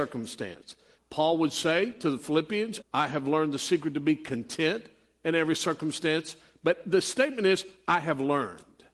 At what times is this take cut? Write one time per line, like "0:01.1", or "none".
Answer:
0:01.0
0:02.8

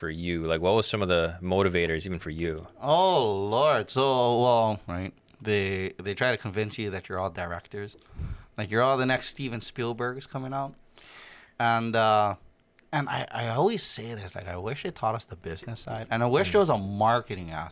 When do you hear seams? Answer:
0:04.8

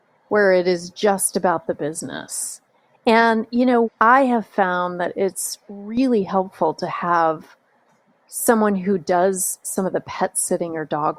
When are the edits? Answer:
0:03.8

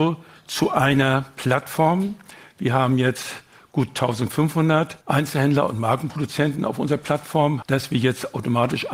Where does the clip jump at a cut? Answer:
0:05.0
0:07.6

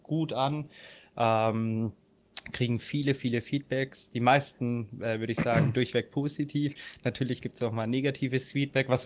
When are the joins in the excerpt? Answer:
none

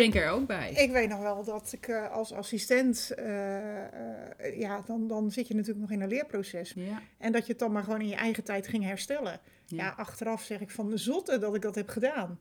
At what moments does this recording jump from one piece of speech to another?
0:06.7

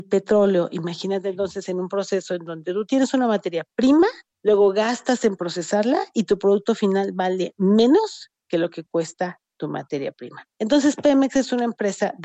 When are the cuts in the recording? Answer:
none

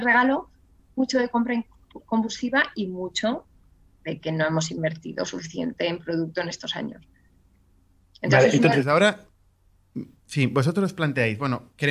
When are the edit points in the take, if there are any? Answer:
none

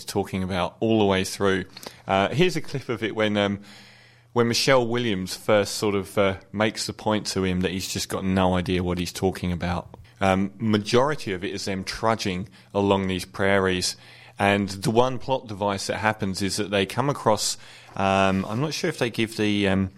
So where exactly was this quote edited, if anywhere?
0:10.0

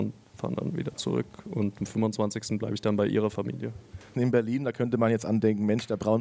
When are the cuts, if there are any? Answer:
0:04.1

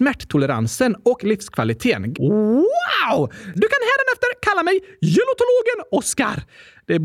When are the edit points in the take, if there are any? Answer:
0:02.1
0:03.5

